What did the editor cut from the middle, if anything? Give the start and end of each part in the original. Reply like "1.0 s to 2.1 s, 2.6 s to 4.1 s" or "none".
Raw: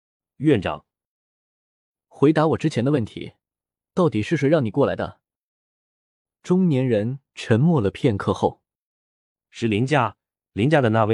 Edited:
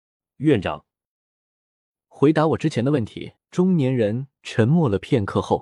3.4 s to 6.3 s

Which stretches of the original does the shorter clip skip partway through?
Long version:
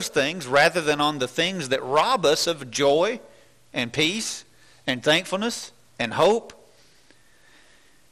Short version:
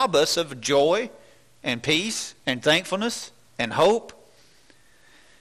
4.5 s to 4.8 s

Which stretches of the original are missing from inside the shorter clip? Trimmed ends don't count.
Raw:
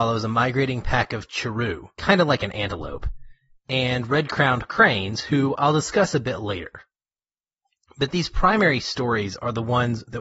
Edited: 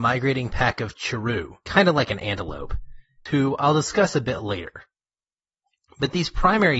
3.6 s to 5.2 s

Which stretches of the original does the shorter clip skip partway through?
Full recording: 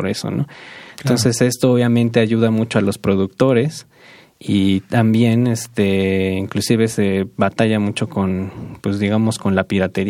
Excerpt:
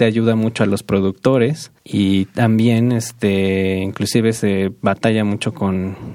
3.9 s to 4.3 s

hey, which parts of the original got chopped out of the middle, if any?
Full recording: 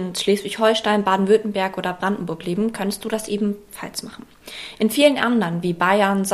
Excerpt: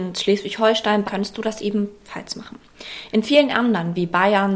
1.0 s to 2.7 s

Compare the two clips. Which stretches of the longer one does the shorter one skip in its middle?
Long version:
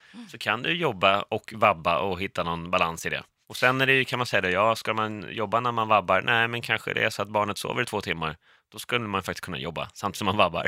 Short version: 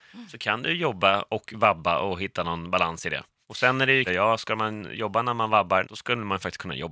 4.1 s to 4.4 s, 6.2 s to 8.7 s

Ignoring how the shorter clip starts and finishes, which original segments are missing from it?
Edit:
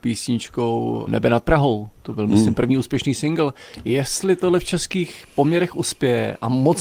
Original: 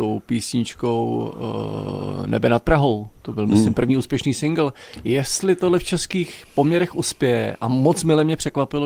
1.3 s to 2.3 s

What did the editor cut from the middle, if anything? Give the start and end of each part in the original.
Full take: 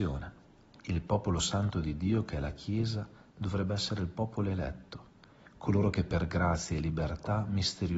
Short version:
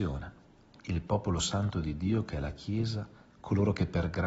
3.3 s to 5.5 s

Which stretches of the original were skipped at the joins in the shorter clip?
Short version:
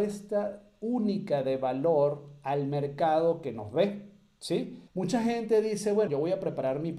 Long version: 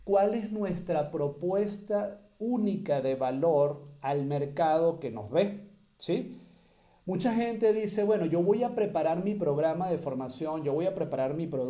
6.5 s to 7.0 s, 8.2 s to 10.6 s

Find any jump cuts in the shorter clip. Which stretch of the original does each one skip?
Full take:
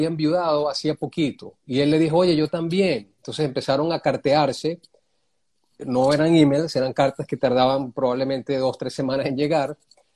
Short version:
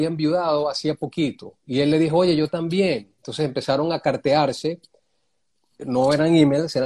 none

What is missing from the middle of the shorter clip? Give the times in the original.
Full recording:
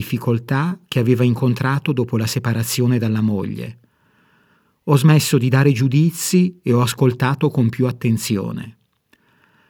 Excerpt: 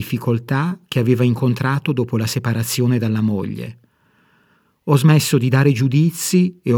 none

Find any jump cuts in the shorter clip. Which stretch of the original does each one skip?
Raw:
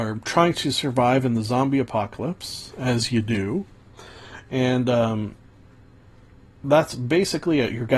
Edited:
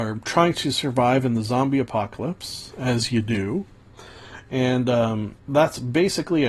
5.4 s to 6.5 s

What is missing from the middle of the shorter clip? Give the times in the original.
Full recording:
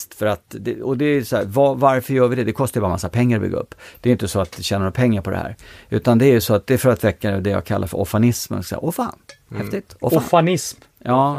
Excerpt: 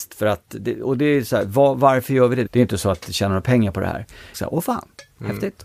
2.5 s to 4.0 s, 5.8 s to 8.6 s

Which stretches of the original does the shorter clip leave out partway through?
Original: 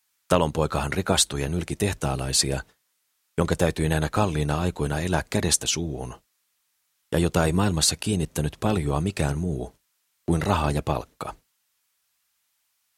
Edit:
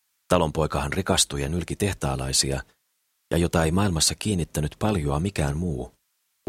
3.2 s to 7.1 s

